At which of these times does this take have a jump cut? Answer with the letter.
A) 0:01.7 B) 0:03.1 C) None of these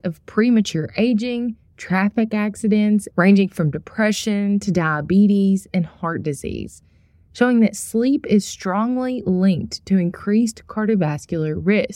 B